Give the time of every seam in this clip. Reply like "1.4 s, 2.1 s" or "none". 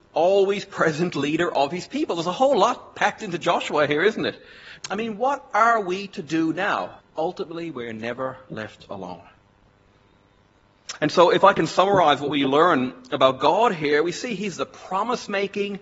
4.8 s, 7.0 s